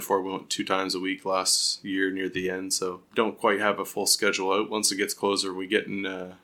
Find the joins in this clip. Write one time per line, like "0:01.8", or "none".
0:03.1